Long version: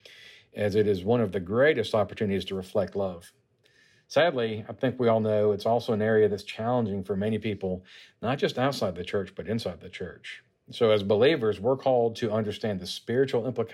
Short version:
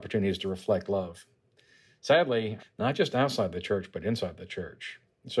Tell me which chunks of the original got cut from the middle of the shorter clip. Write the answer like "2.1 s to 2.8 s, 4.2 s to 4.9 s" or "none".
4.7 s to 8.0 s